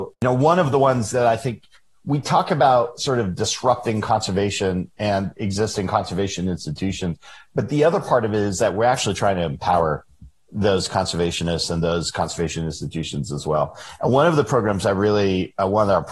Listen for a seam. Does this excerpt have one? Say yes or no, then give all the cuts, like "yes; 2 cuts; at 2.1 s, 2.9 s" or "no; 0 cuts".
no; 0 cuts